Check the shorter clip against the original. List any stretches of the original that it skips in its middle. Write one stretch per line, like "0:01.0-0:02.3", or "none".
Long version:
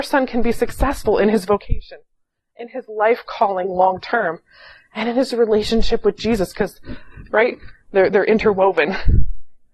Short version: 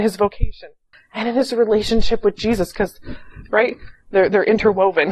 0:02.2-0:04.7